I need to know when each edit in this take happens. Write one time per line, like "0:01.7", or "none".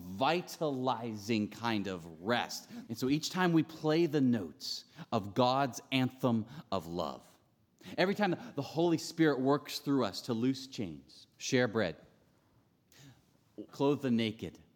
0:02.9
0:11.3
0:13.7